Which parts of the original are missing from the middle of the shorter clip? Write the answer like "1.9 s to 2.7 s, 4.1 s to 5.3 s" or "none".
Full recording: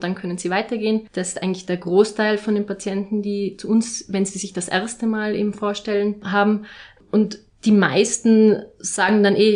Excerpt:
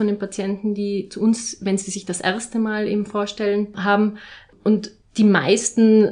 none